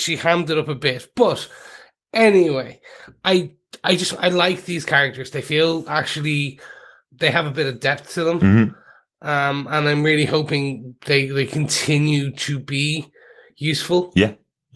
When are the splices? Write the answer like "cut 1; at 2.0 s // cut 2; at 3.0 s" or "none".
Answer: none